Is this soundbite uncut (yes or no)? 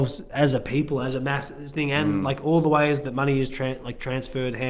yes